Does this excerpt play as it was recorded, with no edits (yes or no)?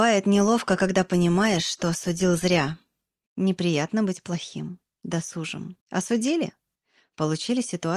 no